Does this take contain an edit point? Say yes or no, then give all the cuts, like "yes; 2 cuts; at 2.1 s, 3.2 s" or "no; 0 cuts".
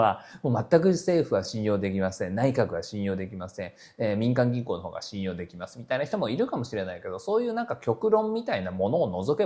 no; 0 cuts